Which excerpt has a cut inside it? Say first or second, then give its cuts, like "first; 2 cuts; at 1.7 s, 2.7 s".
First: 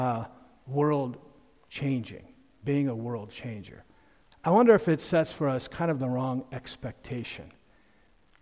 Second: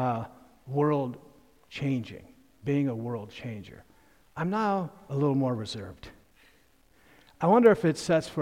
first; 1 cut; at 4.3 s